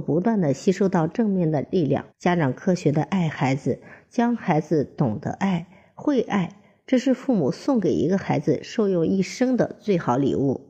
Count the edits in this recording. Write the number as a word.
one